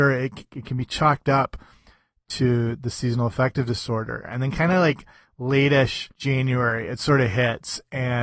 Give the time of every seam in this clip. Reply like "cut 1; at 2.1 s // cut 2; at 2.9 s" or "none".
cut 1; at 4.2 s // cut 2; at 6.1 s